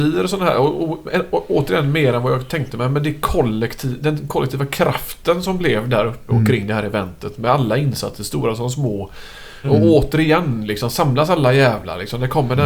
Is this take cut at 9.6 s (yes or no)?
yes